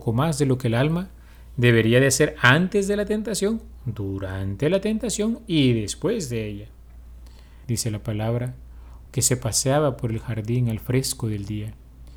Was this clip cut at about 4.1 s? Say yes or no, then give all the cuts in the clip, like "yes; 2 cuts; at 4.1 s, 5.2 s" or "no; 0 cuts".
no; 2 cuts; at 7.6 s, 9.1 s